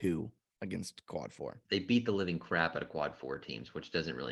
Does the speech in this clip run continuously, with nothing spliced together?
no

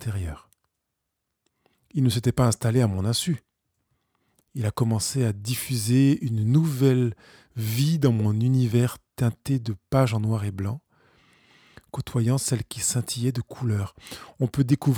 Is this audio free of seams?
no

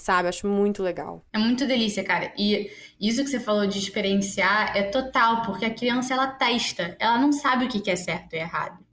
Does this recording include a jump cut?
no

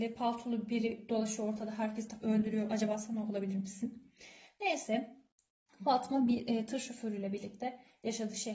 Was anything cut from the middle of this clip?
yes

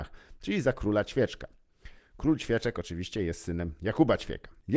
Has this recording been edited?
no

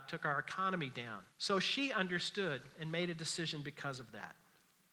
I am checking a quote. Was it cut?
yes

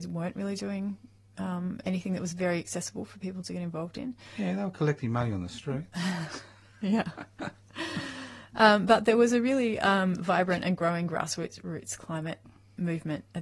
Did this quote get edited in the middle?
no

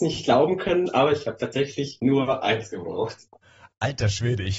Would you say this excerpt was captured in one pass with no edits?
yes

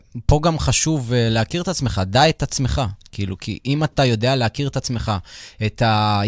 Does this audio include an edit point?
no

